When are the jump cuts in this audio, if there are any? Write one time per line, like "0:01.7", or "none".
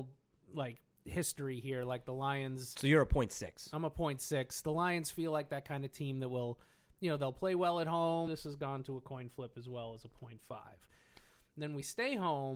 0:08.3